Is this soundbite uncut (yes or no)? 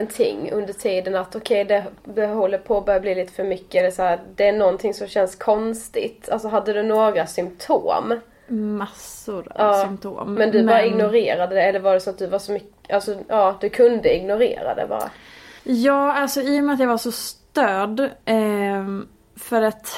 no